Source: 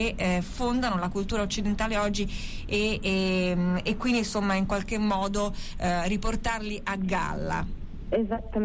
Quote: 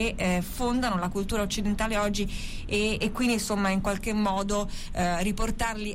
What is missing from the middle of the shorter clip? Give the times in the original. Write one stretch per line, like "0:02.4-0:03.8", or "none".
0:03.0-0:03.8